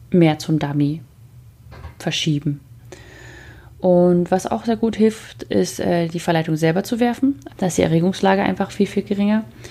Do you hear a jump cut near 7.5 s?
yes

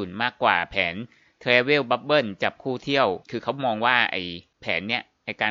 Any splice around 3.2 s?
yes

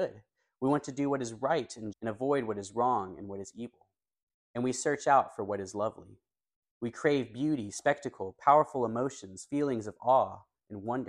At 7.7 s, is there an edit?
no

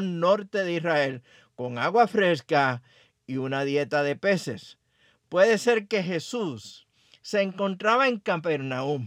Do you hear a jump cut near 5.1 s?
no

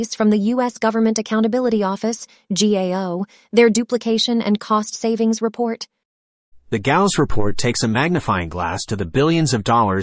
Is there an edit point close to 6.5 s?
yes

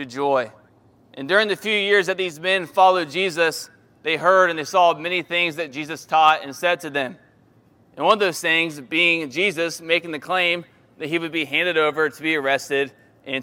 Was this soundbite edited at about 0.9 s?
yes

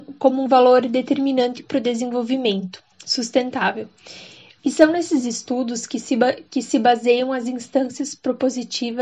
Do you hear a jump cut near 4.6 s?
yes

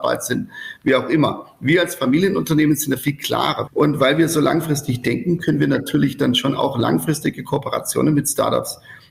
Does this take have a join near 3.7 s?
yes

